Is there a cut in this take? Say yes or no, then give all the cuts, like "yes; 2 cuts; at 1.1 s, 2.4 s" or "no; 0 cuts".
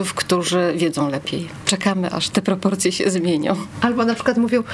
no; 0 cuts